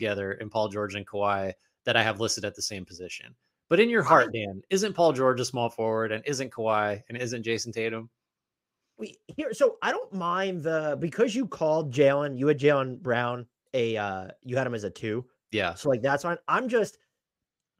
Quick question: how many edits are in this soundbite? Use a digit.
0